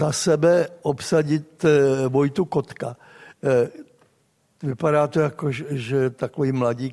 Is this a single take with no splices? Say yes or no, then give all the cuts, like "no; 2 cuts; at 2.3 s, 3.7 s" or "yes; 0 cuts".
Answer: yes; 0 cuts